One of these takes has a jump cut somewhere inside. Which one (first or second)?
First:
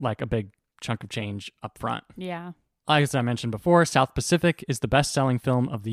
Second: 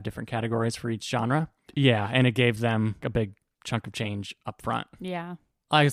second